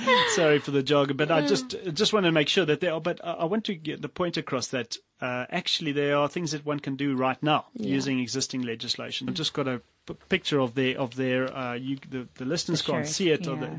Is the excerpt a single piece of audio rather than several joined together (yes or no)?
no